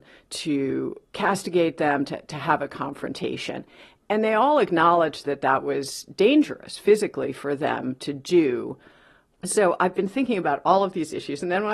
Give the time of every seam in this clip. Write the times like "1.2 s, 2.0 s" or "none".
9.3 s